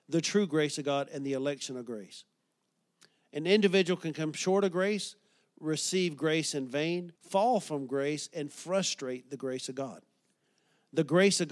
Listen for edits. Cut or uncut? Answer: cut